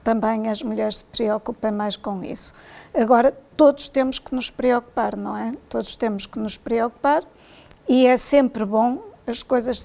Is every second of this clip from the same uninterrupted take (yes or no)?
yes